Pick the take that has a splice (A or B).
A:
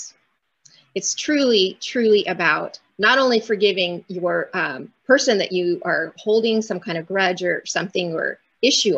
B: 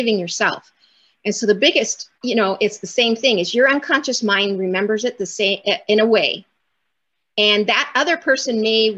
B